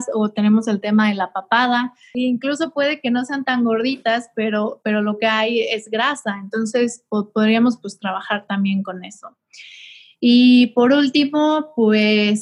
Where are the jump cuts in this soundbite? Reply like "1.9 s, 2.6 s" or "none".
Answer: 2.1 s